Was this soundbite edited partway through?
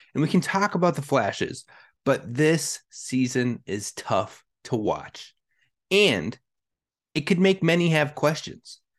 no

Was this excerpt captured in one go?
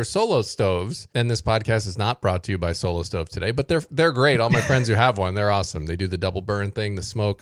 yes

